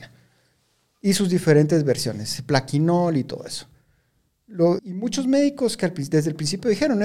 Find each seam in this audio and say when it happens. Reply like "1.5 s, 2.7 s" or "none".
4.8 s

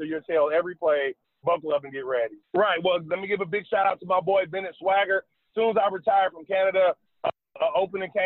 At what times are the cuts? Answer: 2.4 s

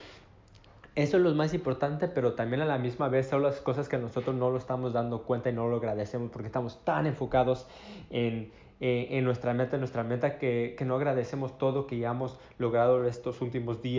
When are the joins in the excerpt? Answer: none

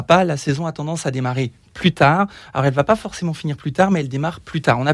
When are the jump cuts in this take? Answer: none

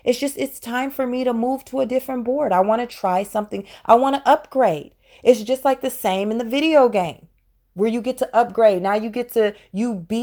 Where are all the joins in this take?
none

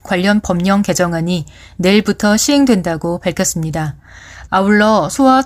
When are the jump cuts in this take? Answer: 4.5 s

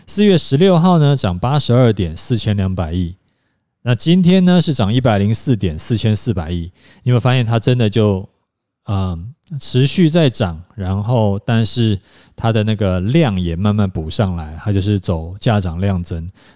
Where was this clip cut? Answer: none

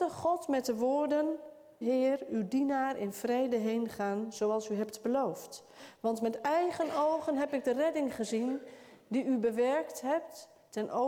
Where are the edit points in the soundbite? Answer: 1.8 s

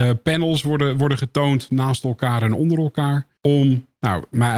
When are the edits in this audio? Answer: 3.4 s

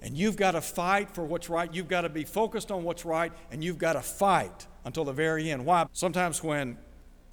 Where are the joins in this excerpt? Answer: 5.9 s

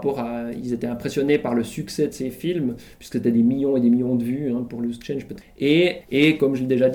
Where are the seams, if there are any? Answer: 4.7 s, 6.0 s

